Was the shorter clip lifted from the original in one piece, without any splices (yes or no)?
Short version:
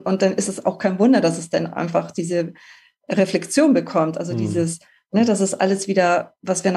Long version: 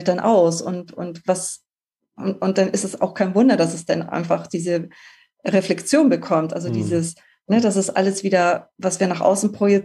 yes